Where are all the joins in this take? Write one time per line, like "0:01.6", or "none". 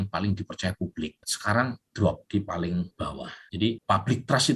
none